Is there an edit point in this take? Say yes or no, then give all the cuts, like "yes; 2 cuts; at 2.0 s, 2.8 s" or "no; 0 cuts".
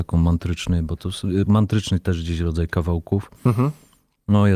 no; 0 cuts